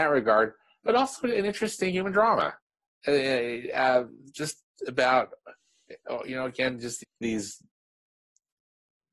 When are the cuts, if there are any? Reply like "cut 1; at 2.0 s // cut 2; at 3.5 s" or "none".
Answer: cut 1; at 7.0 s

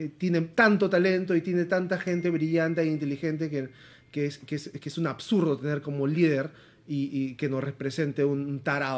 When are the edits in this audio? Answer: none

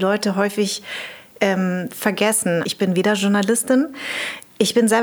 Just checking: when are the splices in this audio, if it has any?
cut 1; at 2.6 s

